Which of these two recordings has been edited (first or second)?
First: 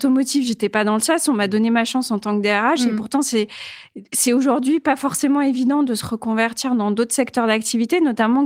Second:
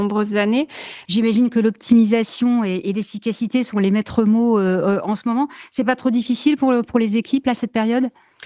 second